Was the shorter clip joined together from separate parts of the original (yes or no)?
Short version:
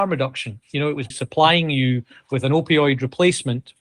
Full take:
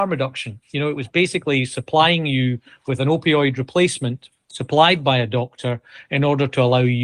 yes